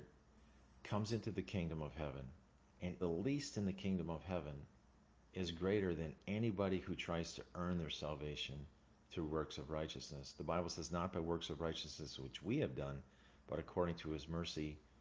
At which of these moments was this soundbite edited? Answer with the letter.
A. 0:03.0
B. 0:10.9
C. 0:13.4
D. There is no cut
A